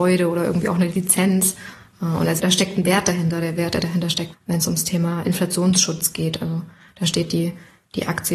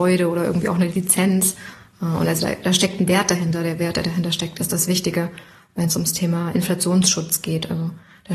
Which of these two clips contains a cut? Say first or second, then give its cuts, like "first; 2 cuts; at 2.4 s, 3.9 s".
first; 2 cuts; at 2.4 s, 4.3 s